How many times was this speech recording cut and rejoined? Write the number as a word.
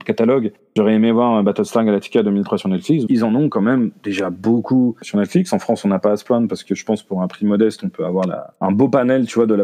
one